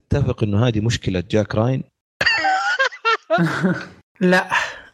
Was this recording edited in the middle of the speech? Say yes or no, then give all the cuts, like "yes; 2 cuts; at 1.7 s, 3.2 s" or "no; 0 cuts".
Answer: no; 0 cuts